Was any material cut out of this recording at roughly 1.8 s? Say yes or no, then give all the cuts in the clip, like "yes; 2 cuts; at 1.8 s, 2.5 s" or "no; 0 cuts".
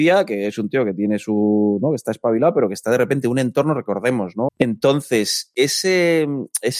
no; 1 cut; at 4.5 s